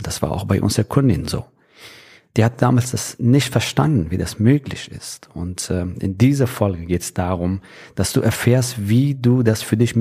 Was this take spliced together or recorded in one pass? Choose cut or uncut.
uncut